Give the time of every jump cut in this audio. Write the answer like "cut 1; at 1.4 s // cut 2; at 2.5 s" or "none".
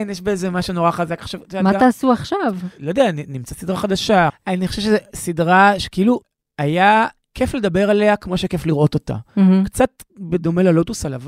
cut 1; at 4.3 s